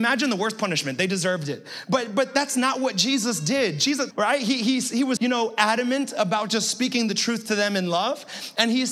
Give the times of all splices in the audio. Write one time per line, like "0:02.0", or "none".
0:04.1
0:05.2